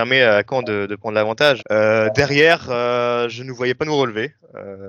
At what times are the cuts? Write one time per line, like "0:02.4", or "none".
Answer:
0:01.6